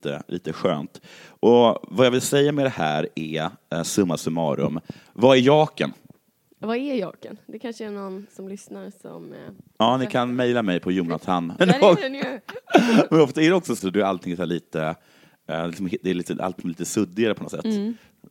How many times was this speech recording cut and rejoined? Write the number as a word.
three